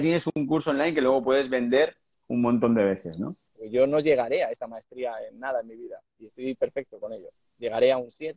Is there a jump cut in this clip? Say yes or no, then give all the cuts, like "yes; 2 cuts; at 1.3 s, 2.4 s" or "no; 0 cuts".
yes; 1 cut; at 3.5 s